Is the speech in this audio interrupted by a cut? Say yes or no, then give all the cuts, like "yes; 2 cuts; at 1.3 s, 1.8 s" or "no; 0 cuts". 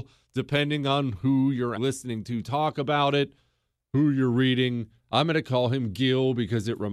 yes; 1 cut; at 1.8 s